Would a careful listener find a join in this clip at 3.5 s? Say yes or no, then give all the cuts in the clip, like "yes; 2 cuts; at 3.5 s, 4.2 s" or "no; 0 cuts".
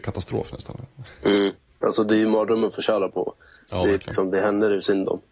no; 0 cuts